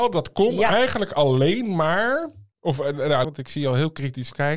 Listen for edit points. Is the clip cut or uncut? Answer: cut